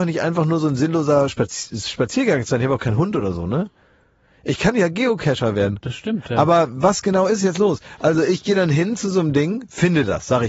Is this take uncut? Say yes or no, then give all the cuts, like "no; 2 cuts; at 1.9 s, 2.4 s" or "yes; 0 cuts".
yes; 0 cuts